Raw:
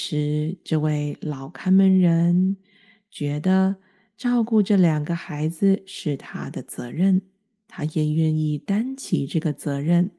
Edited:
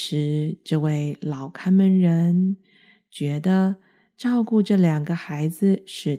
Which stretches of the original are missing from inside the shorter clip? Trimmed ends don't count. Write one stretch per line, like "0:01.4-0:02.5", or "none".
none